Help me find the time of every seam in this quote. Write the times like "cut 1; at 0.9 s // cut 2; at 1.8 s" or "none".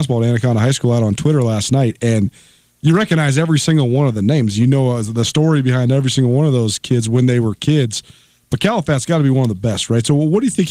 none